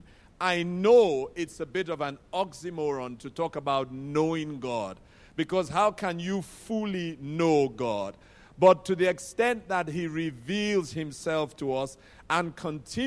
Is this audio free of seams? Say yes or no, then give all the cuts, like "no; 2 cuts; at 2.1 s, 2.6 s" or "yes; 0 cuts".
yes; 0 cuts